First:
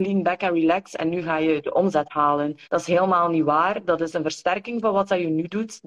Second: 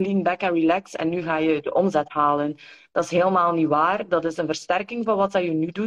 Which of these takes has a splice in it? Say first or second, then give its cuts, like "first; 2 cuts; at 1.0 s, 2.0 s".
first; 1 cut; at 2.6 s